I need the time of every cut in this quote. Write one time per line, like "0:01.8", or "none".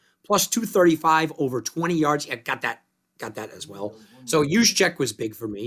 none